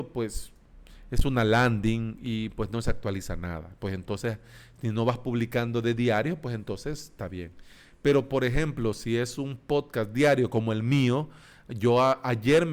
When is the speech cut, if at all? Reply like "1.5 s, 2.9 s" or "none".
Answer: none